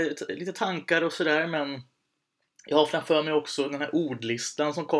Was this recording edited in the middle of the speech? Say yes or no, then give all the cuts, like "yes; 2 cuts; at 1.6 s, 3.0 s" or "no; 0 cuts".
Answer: no; 0 cuts